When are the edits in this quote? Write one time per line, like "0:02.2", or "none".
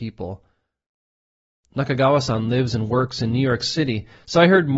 none